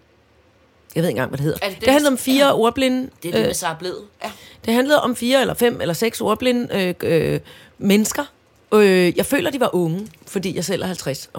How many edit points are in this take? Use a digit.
1